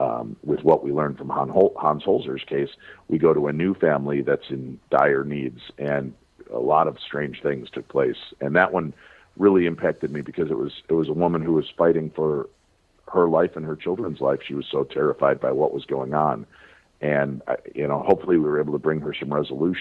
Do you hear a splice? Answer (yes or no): no